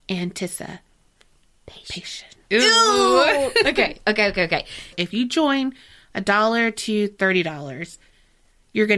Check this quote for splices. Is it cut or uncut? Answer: cut